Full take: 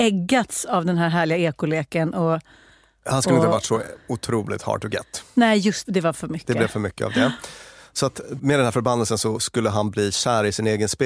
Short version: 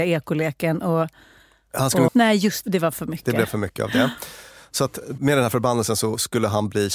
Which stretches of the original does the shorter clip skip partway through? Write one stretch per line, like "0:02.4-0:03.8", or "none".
0:03.4-0:05.3